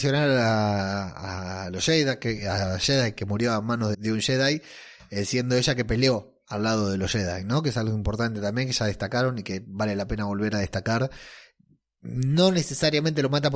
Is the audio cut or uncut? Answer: cut